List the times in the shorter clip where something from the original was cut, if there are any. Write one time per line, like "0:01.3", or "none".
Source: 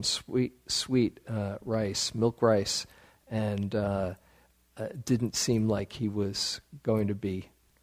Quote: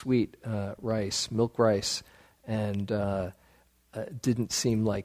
none